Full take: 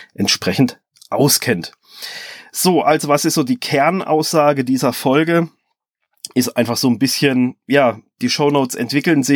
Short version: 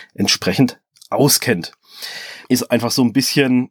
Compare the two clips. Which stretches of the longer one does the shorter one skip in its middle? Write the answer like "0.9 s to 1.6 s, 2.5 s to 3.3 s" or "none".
2.4 s to 6.3 s

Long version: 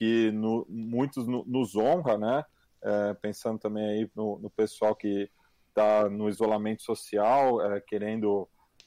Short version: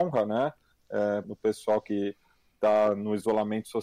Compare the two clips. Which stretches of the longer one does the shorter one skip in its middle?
3.2 s to 4.4 s

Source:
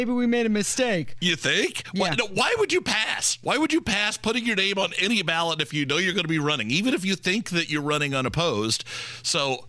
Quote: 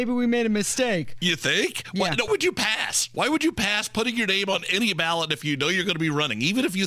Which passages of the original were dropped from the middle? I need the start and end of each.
2.3 s to 2.6 s

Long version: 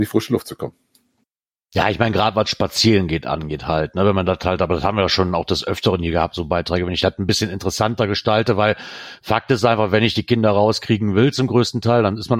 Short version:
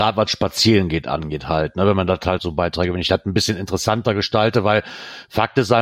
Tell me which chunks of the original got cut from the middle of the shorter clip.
4.6 s to 6.3 s

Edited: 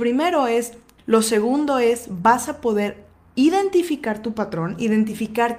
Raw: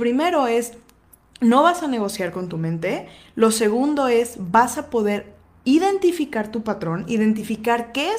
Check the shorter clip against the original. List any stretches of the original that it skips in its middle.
1.0 s to 3.3 s

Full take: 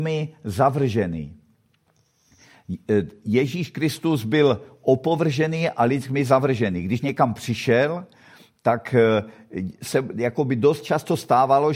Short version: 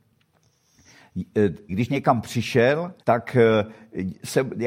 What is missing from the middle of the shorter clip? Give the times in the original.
3.2 s to 6.8 s, 8.1 s to 8.6 s

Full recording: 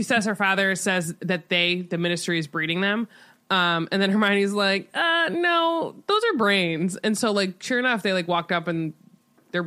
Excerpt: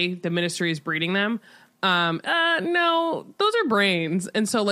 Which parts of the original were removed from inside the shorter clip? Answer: 3.9 s to 4.9 s

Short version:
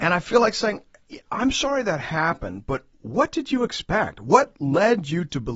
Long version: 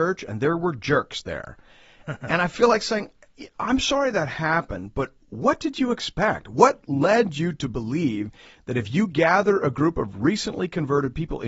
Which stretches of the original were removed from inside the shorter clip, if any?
none

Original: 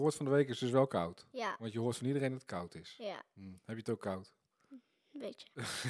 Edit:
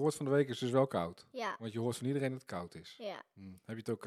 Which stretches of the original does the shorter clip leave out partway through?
none

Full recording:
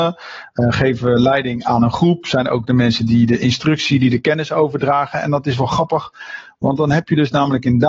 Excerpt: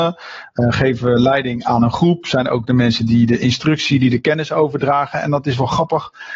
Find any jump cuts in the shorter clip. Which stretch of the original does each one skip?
none

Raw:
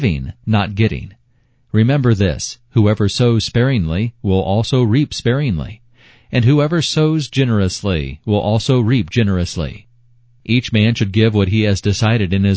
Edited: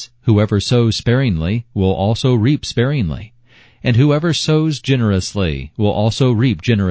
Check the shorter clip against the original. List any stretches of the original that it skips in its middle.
none

